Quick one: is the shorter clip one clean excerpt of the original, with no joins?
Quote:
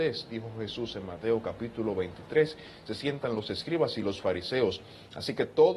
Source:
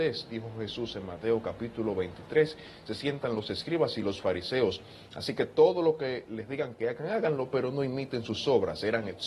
yes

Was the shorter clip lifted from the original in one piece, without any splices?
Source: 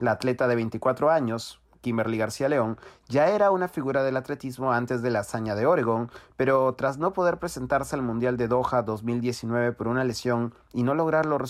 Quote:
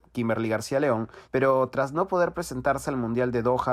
no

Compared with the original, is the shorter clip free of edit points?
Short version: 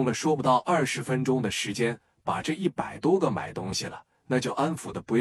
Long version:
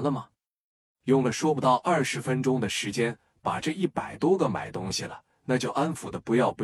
yes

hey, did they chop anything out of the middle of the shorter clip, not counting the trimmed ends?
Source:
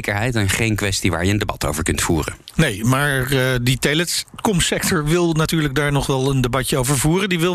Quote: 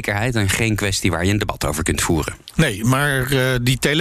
no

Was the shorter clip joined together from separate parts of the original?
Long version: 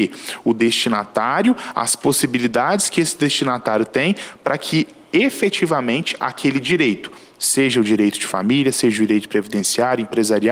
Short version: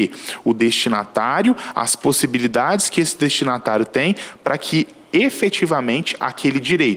no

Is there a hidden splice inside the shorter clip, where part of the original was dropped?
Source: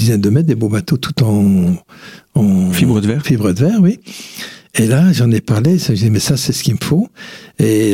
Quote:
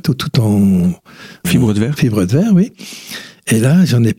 yes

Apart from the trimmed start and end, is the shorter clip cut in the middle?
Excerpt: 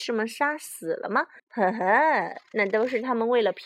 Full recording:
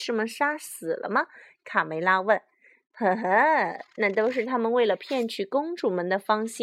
yes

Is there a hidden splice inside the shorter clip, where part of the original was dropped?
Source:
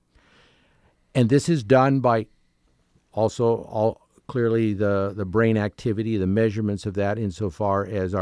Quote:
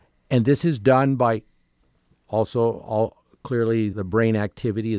yes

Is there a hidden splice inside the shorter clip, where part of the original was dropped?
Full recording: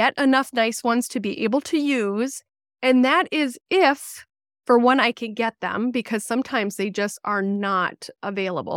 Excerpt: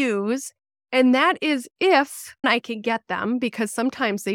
yes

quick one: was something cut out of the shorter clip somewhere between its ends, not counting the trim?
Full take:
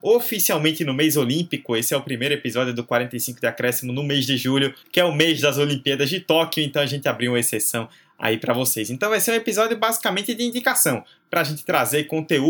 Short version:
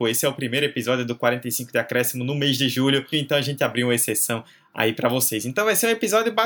yes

